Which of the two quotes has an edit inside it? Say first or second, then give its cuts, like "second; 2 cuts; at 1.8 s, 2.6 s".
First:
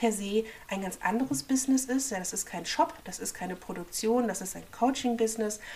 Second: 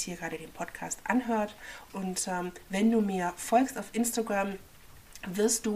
second; 1 cut; at 1.9 s